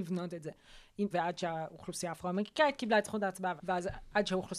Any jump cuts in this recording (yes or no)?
yes